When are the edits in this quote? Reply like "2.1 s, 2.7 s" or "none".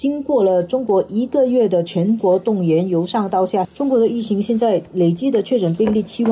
3.6 s